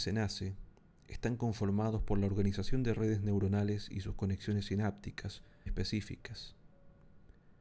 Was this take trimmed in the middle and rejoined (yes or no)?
yes